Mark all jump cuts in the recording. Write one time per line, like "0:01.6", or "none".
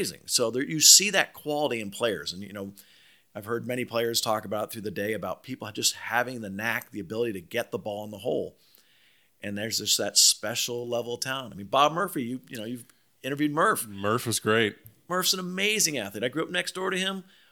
none